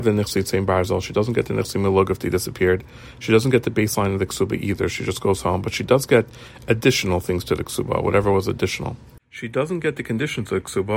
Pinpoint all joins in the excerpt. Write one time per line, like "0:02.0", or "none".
none